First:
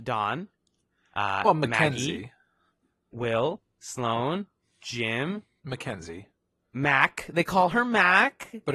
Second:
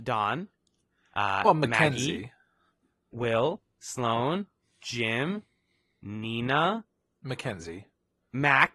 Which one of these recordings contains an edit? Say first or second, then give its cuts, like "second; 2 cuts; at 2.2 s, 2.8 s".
first; 1 cut; at 5.6 s